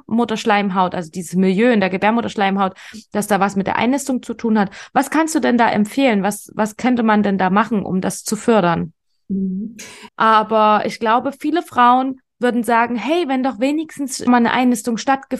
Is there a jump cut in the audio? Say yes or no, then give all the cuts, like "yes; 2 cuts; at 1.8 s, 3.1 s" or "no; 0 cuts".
yes; 2 cuts; at 10.1 s, 14.3 s